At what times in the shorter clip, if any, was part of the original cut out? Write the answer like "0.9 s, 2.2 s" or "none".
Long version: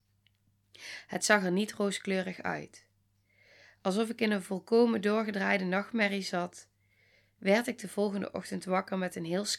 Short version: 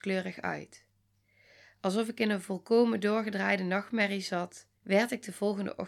4.8 s